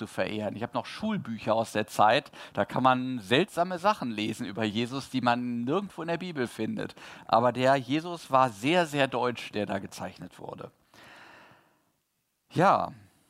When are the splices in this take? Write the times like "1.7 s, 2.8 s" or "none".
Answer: none